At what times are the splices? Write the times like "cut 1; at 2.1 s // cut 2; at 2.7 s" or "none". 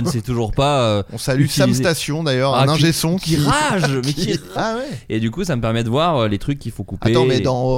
cut 1; at 4.6 s